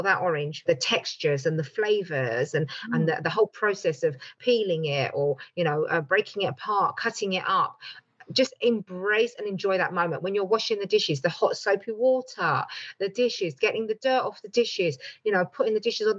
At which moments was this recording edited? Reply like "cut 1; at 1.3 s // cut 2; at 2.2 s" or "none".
none